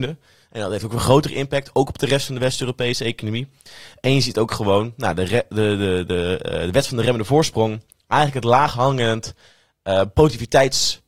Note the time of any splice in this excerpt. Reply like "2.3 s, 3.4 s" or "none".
none